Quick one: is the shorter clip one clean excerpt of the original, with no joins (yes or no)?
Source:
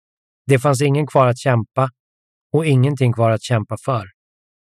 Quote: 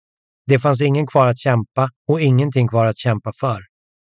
no